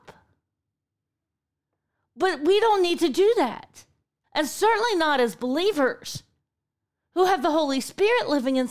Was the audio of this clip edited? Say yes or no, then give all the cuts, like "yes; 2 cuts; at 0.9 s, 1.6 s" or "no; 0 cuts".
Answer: yes; 1 cut; at 4.2 s